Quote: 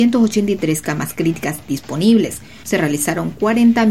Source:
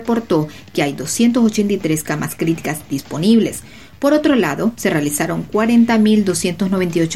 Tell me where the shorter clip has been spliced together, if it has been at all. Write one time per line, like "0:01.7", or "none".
0:02.6

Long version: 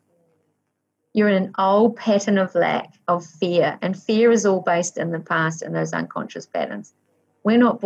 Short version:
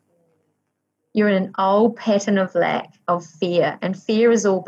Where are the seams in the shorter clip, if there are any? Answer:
none

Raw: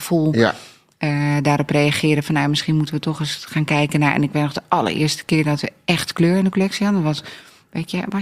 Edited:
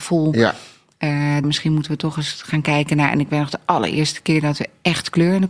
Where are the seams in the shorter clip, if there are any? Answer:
0:01.4

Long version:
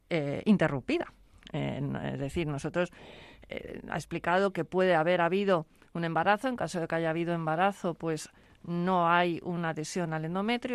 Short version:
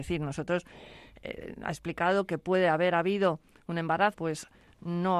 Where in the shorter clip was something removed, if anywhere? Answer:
0:04.1

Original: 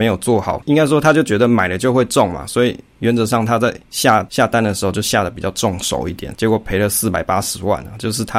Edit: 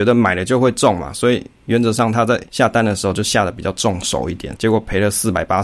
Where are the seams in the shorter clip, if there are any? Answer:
0:02.5

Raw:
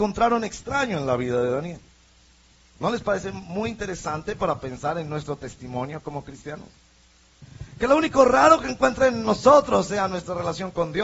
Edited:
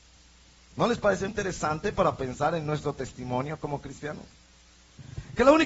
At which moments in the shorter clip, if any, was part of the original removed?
0:01.3

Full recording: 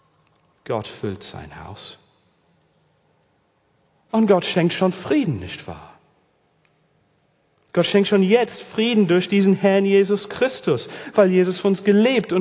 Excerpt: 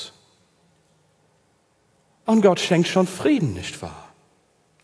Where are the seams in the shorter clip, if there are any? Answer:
none

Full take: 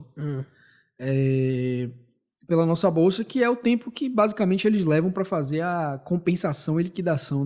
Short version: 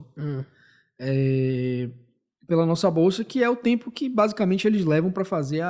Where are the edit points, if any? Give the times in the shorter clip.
none

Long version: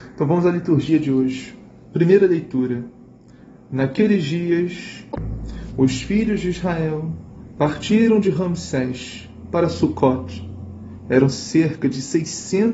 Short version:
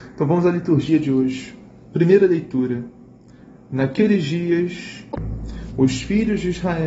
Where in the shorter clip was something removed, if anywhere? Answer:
none

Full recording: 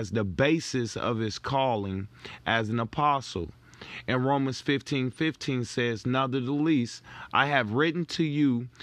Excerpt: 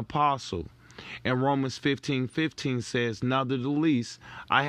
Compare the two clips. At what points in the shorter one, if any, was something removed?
none

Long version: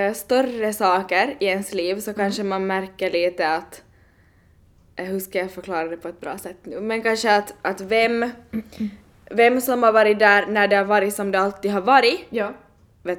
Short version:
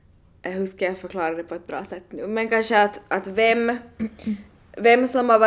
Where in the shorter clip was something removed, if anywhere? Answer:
none

